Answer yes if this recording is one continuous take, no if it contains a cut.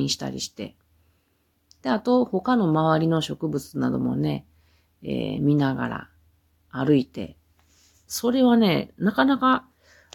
yes